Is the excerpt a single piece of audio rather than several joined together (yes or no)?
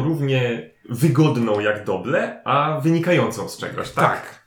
yes